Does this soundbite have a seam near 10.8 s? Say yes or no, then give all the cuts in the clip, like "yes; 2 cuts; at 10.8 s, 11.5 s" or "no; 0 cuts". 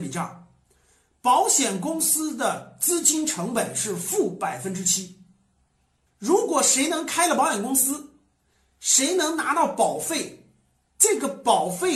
no; 1 cut; at 6.1 s